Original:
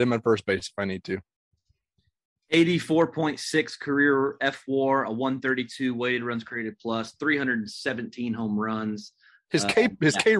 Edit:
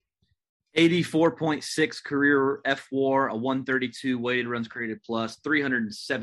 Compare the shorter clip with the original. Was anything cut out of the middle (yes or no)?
no